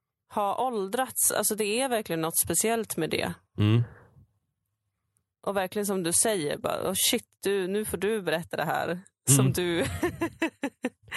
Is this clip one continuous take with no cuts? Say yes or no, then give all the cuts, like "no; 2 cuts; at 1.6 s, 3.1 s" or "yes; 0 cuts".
yes; 0 cuts